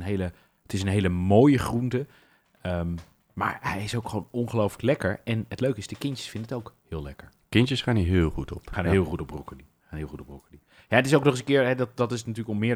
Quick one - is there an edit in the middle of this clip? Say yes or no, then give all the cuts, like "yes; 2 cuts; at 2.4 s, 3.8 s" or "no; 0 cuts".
no; 0 cuts